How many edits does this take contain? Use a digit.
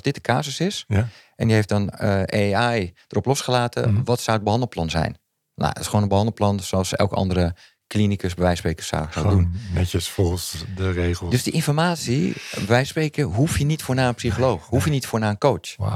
0